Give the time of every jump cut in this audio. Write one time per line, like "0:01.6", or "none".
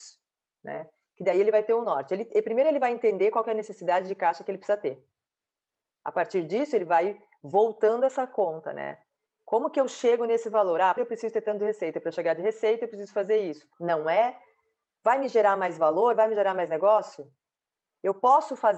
0:11.0
0:13.7